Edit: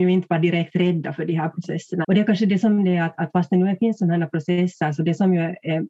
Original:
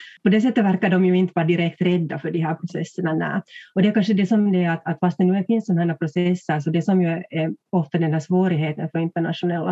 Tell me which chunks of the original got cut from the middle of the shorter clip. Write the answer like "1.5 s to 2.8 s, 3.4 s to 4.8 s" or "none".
3.1 s to 3.7 s